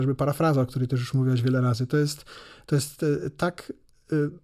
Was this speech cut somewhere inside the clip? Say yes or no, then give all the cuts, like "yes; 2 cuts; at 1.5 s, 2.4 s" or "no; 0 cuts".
no; 0 cuts